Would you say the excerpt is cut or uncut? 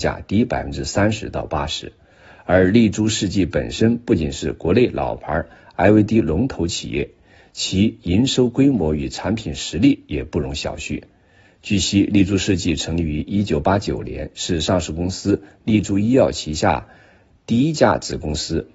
uncut